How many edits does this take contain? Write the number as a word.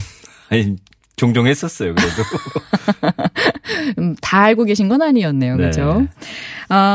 zero